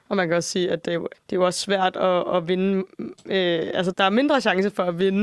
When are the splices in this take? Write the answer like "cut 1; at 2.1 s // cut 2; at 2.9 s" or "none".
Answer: cut 1; at 1.1 s // cut 2; at 3.9 s